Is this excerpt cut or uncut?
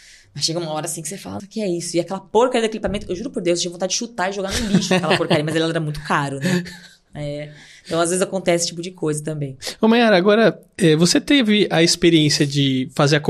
cut